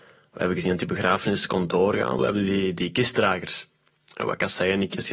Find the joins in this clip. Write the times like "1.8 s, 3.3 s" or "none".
2.2 s